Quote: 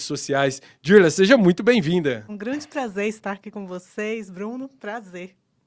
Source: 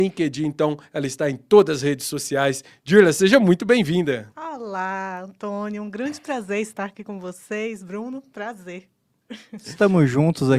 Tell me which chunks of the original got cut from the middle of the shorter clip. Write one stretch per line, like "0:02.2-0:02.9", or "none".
0:04.3-0:05.8